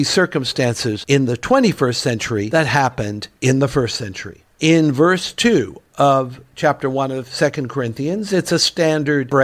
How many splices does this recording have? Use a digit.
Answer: 0